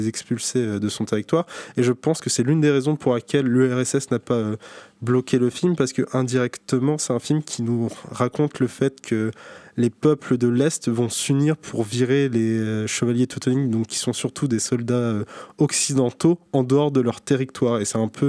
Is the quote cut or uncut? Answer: uncut